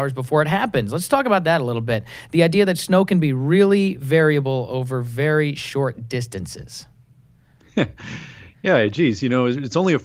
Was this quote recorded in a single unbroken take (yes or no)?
yes